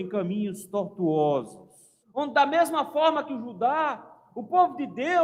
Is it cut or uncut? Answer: cut